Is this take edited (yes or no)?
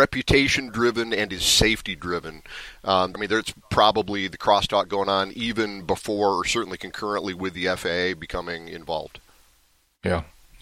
yes